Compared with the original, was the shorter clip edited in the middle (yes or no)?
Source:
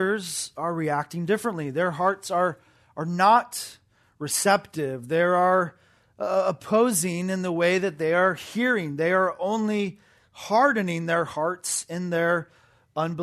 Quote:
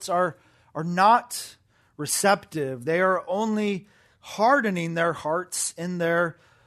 yes